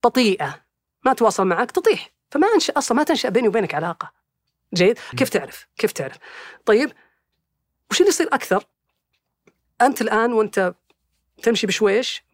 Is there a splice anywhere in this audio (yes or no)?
yes